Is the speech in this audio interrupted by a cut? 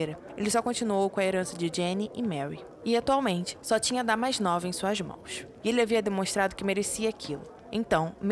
yes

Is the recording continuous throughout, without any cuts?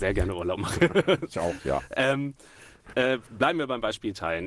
yes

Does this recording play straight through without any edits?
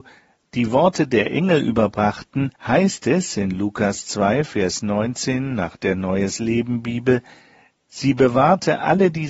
no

